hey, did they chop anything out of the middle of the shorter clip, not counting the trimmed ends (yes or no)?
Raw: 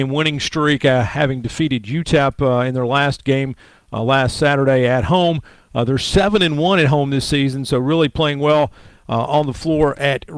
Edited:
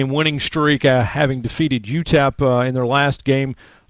no